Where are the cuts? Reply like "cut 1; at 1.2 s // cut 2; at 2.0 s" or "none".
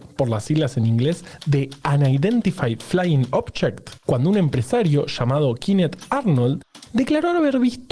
cut 1; at 4.0 s